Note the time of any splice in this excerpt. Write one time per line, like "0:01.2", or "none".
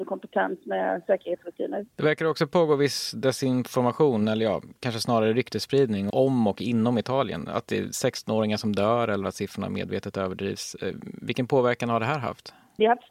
none